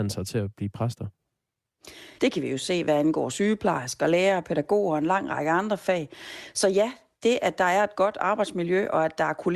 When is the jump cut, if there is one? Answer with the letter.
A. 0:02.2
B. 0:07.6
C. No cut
A